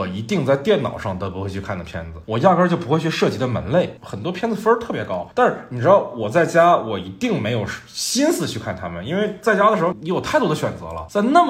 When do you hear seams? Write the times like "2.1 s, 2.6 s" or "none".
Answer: 9.9 s